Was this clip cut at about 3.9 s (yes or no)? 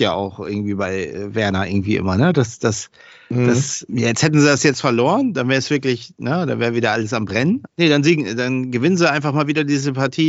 yes